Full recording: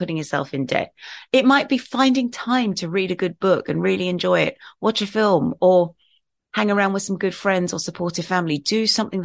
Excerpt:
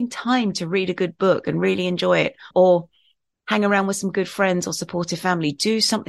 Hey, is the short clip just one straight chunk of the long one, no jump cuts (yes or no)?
no